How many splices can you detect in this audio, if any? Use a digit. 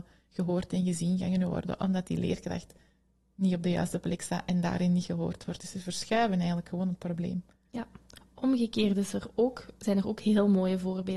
0